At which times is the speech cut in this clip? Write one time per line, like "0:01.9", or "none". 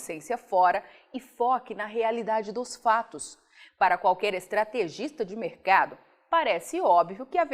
0:03.7